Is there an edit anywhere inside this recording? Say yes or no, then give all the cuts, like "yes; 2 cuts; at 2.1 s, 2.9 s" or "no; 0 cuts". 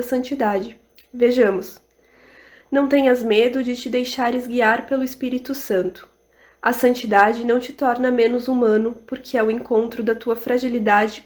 yes; 1 cut; at 2.6 s